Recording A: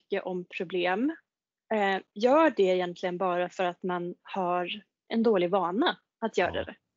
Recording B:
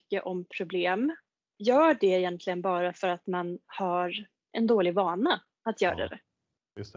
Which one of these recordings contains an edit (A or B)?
B